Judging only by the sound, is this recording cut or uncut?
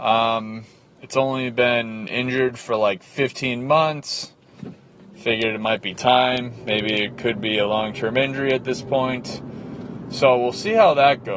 uncut